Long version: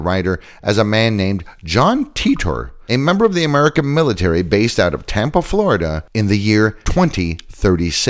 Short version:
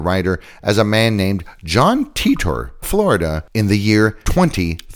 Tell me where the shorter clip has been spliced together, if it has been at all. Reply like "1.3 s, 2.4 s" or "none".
2.8 s